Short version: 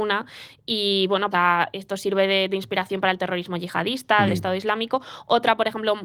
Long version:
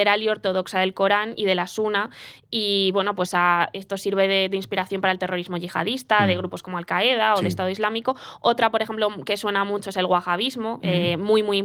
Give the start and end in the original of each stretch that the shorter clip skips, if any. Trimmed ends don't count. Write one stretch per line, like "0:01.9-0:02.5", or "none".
0:03.2-0:03.3
0:06.3-0:07.4